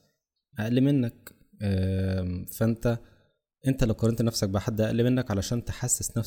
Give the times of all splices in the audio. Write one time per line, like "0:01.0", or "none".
none